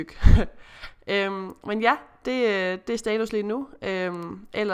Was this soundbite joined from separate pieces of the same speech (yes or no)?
no